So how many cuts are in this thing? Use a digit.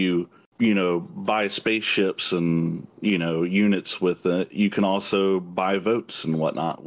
0